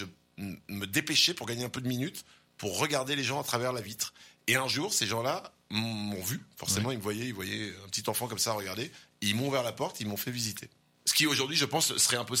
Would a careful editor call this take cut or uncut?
uncut